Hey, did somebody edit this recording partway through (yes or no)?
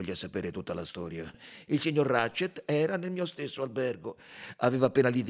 yes